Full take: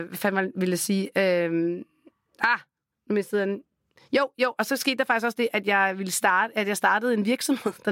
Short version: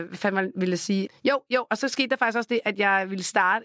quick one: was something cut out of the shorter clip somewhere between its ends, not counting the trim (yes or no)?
yes